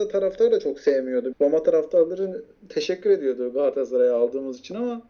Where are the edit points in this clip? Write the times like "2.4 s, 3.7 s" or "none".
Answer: 1.3 s